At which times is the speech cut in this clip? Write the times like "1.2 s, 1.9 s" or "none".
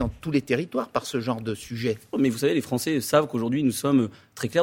2.1 s